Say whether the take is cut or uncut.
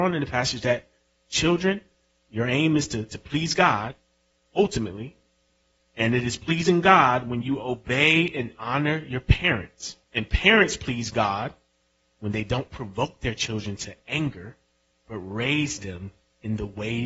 cut